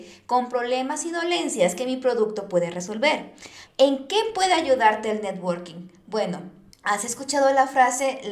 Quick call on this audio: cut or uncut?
cut